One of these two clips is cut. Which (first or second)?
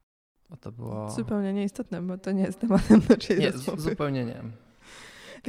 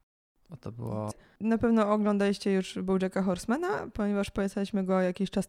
second